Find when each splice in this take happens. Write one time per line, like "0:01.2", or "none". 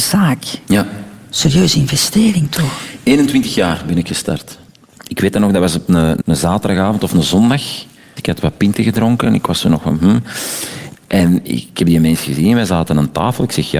0:06.2
0:08.2
0:10.9